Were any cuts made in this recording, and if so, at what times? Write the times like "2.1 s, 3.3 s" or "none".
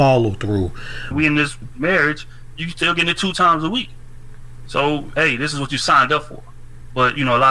1.1 s